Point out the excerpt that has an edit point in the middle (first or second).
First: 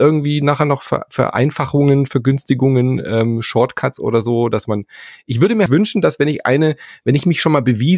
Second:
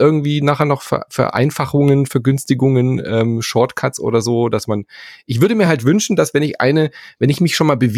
first